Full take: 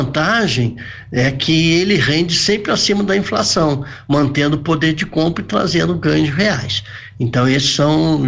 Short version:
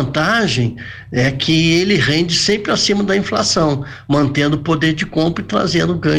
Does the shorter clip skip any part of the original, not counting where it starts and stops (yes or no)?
no